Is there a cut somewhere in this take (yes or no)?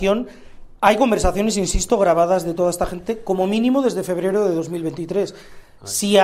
no